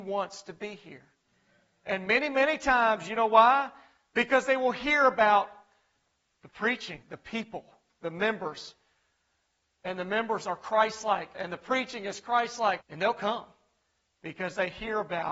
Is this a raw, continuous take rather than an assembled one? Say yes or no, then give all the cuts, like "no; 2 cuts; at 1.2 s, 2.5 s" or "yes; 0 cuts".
no; 3 cuts; at 7.0 s, 11.3 s, 12.8 s